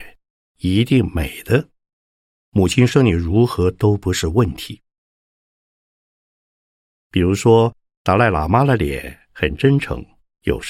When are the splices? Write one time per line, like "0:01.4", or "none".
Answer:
none